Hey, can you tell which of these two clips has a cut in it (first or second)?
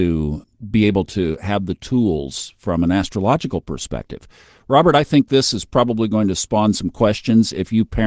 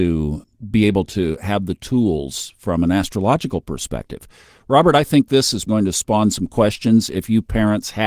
second